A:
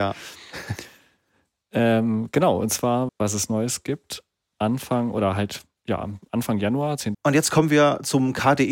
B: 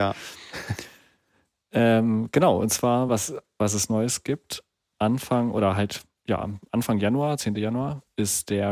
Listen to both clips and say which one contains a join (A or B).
A